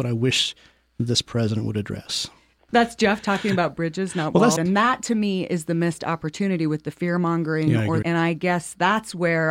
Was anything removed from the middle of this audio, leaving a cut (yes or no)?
yes